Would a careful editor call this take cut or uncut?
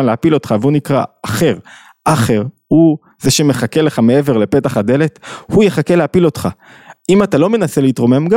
uncut